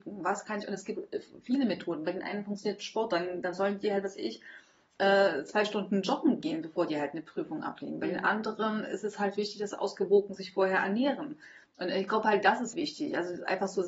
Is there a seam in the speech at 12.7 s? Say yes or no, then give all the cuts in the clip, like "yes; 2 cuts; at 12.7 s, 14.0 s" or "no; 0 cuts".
yes; 2 cuts; at 11.6 s, 12.7 s